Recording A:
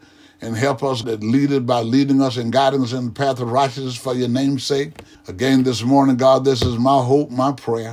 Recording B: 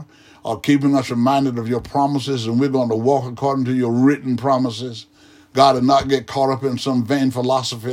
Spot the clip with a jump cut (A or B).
A